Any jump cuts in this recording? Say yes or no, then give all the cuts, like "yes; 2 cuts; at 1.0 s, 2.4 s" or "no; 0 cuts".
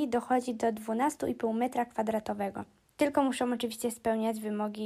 yes; 1 cut; at 2.8 s